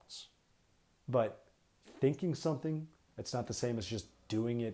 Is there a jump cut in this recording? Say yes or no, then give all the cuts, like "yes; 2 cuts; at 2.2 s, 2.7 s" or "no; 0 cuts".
yes; 2 cuts; at 1.0 s, 3.1 s